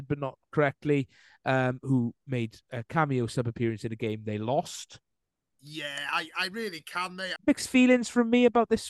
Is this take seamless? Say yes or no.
no